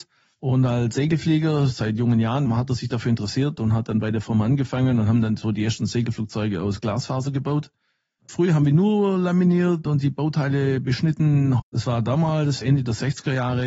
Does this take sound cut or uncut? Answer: cut